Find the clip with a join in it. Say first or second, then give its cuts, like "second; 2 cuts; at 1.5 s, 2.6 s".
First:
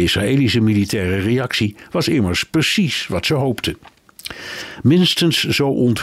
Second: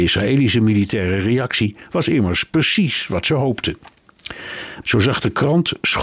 second; 1 cut; at 4.8 s